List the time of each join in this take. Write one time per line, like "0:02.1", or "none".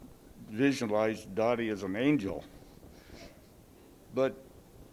none